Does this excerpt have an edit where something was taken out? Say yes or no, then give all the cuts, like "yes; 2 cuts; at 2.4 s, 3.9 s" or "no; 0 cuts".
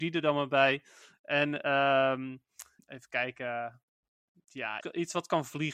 yes; 2 cuts; at 2.8 s, 4.8 s